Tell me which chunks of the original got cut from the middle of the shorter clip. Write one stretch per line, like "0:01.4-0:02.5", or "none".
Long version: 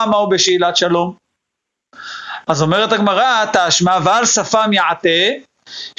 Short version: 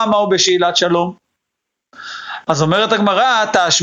none

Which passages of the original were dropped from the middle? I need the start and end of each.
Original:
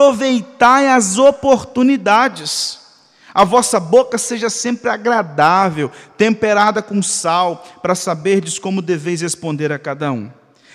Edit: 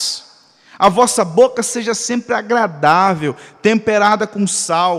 none

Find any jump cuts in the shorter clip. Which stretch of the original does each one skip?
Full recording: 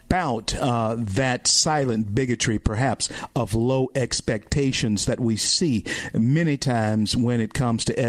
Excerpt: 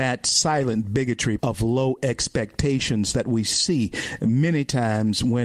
0:02.6-0:03.3

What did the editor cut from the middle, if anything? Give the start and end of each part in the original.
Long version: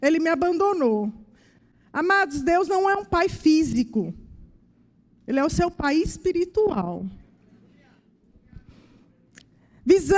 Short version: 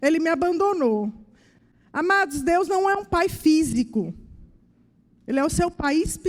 none

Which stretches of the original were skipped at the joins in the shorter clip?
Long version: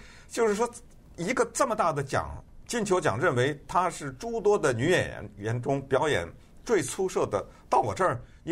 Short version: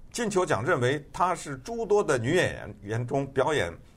none

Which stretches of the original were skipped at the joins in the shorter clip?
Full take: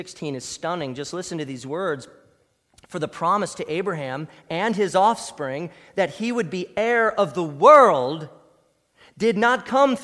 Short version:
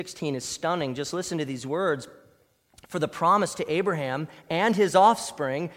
none

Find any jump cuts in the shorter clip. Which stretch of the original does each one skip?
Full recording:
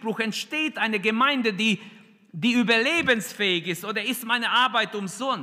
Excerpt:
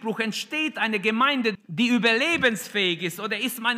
0:01.5-0:02.2

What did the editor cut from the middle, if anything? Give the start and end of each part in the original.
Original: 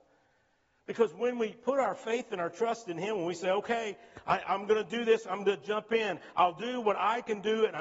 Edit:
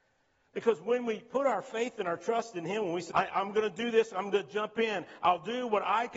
0:03.4-0:04.2

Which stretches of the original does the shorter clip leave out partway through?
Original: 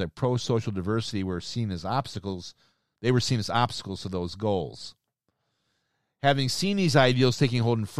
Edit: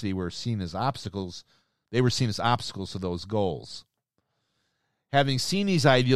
none

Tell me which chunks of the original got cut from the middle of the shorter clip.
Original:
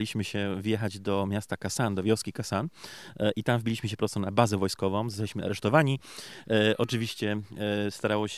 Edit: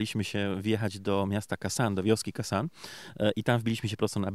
none

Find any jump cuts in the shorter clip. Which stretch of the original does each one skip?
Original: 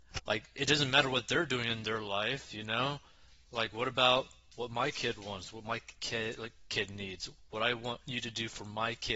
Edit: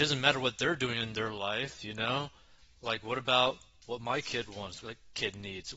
0:05.5-0:06.4

